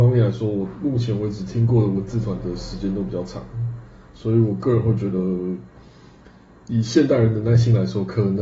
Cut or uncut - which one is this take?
uncut